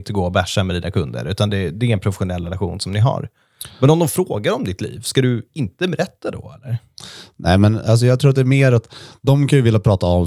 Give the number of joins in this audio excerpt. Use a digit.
0